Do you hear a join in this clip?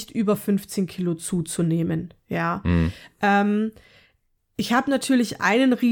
no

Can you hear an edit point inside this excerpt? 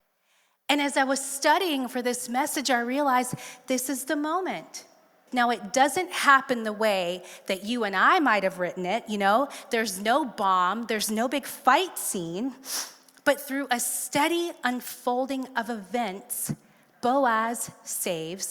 yes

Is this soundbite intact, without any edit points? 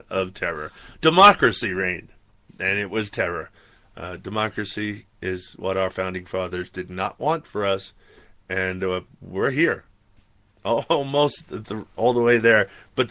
yes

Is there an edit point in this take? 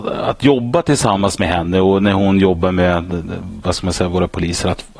no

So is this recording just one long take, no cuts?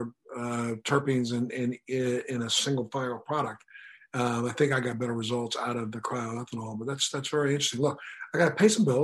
yes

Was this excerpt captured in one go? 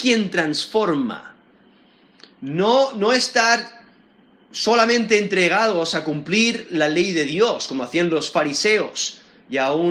yes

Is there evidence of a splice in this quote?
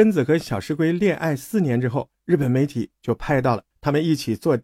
yes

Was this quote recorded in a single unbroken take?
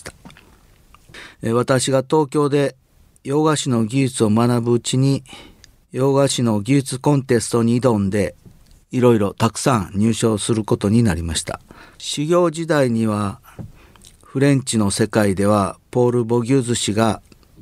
yes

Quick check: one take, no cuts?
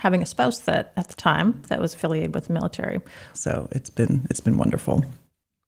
no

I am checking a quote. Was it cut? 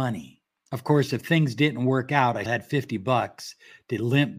yes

